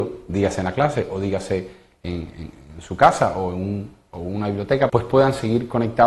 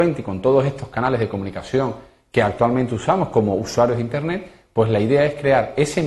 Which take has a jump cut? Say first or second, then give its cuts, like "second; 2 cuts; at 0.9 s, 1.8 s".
first; 1 cut; at 4.9 s